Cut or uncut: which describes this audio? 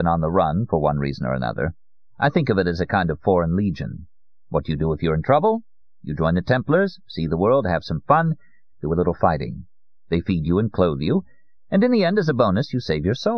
uncut